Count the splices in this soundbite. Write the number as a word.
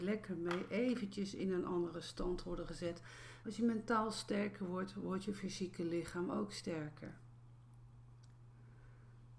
one